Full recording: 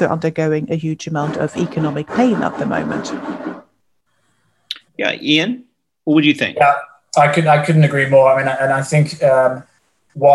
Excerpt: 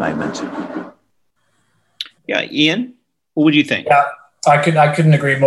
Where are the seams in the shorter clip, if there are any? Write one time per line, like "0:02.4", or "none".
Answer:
none